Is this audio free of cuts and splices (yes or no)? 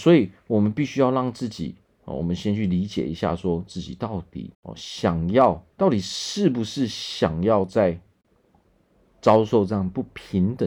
no